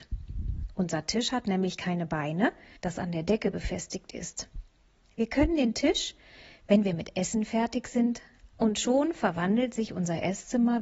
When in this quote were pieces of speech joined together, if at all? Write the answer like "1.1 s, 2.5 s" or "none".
2.8 s, 8.5 s